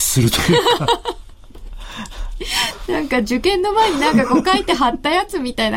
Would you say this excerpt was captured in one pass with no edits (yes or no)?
yes